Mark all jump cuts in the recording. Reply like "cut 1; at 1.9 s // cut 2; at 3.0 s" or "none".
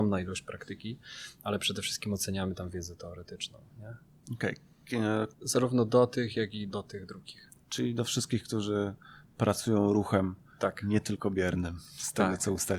cut 1; at 5.3 s // cut 2; at 6.7 s